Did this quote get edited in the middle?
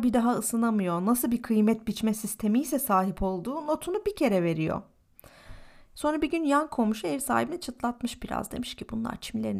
yes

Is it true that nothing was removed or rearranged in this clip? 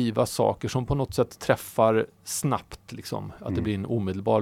yes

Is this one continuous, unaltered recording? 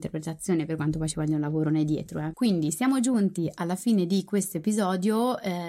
no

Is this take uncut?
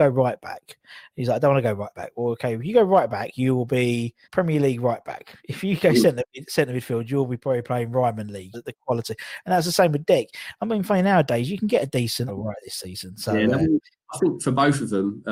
no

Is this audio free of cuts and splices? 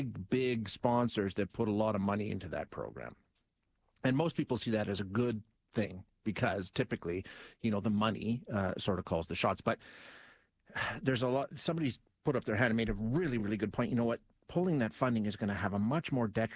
yes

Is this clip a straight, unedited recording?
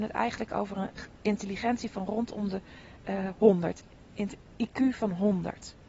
yes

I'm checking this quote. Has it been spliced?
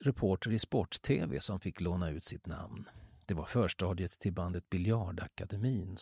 no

